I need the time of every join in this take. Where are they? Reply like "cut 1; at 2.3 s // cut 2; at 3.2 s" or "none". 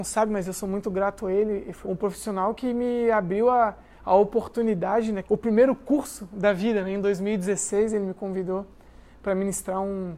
cut 1; at 1.8 s // cut 2; at 5.2 s